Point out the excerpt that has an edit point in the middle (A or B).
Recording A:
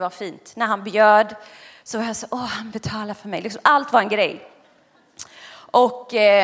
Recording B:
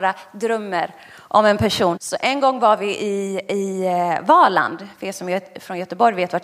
B